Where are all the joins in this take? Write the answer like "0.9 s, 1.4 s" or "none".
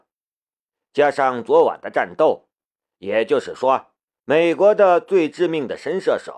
4.2 s